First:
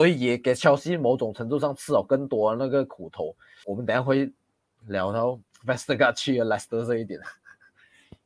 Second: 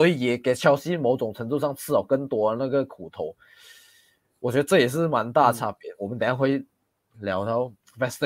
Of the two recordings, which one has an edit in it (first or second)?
first